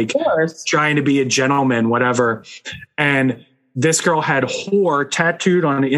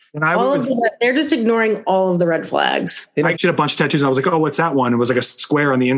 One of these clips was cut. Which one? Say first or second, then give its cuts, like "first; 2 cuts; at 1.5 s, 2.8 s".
second; 1 cut; at 3.3 s